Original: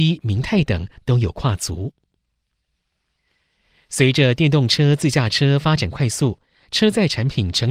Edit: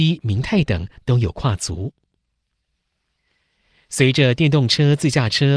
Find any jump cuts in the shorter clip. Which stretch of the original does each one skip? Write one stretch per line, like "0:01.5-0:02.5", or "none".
none